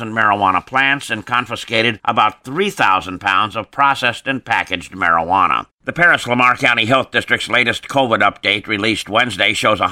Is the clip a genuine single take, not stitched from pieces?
no; 1 cut; at 5.7 s

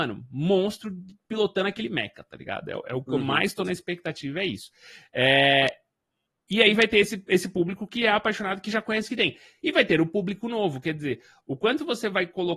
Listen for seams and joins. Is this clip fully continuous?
yes; 0 cuts

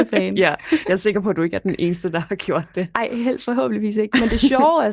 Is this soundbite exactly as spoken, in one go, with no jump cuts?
yes; 0 cuts

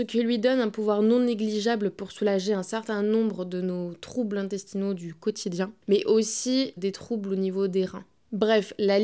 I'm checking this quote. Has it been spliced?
yes; 1 cut; at 6.8 s

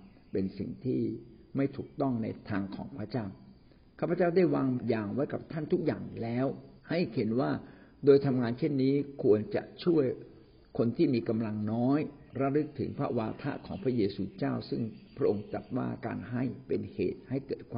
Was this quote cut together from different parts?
yes; 2 cuts; at 4.8 s, 6.8 s

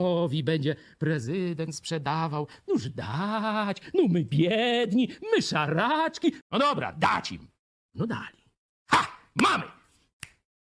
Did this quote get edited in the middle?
yes; 1 cut; at 6.4 s

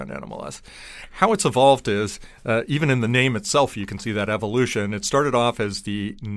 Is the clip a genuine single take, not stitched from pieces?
yes; 0 cuts

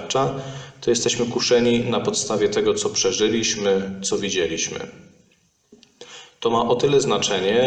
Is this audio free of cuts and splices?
yes; 0 cuts

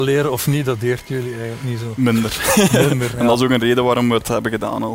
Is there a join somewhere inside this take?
no; 0 cuts

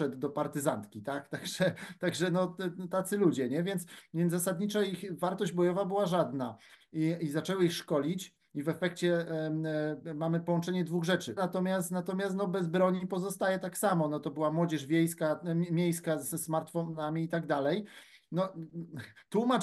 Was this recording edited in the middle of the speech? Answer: yes; 2 cuts; at 6.7 s, 11.4 s

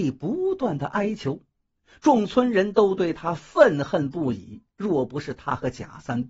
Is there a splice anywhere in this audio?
no; 0 cuts

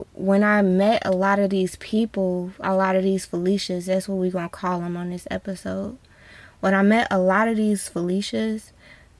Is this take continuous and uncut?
yes; 0 cuts

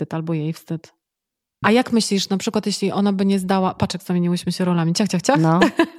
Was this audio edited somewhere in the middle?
yes; 1 cut; at 1.6 s

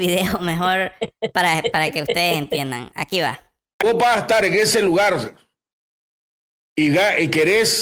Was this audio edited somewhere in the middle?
no; 0 cuts

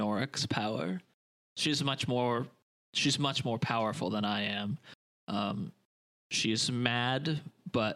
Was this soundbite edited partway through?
no; 0 cuts

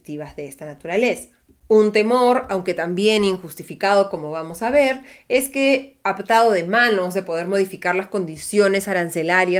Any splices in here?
yes; 1 cut; at 1.6 s

